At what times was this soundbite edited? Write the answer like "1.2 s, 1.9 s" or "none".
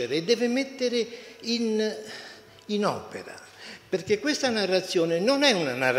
none

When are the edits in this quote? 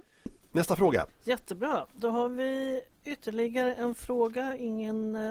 1.1 s

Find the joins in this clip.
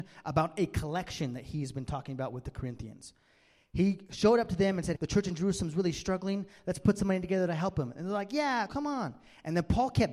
4.9 s, 8.7 s

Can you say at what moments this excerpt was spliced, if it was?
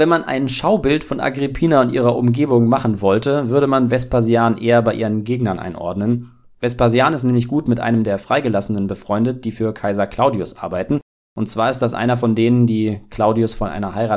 none

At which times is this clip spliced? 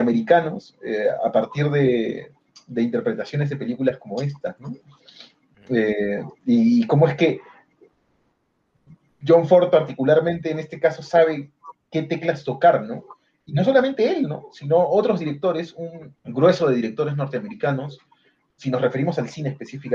16.2 s

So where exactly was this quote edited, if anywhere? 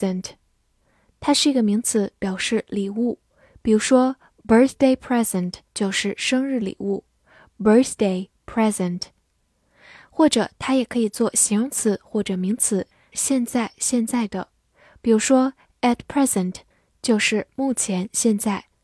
5.6 s

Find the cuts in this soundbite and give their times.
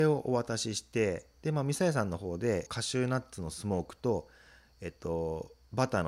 2.7 s

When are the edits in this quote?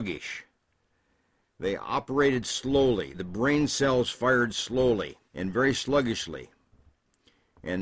3.1 s, 5.3 s

